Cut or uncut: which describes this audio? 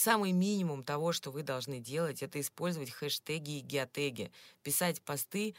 uncut